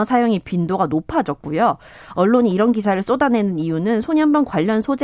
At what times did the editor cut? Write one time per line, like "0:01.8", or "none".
none